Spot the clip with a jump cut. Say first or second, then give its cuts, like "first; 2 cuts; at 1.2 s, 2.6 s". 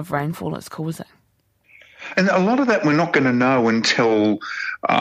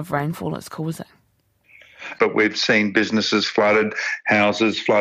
second; 1 cut; at 2.1 s